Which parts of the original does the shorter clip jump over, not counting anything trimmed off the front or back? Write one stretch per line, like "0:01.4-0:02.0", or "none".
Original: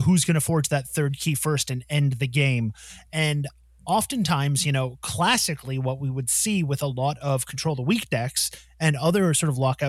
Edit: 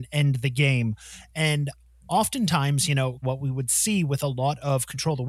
0:05.0-0:05.8